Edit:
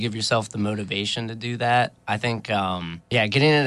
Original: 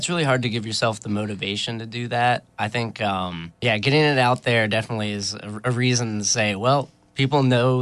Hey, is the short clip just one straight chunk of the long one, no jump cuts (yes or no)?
yes